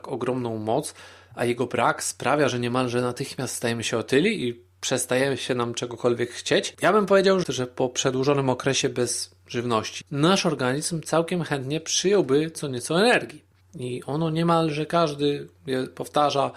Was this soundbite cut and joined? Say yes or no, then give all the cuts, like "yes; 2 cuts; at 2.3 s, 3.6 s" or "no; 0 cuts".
yes; 3 cuts; at 7.4 s, 10.0 s, 13.6 s